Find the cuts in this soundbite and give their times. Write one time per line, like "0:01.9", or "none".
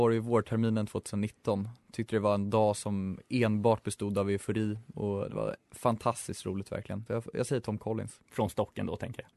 0:07.1
0:08.2